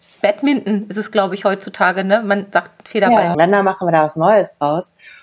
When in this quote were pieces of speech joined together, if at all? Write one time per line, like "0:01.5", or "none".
0:03.3